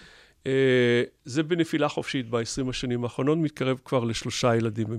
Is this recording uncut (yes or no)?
yes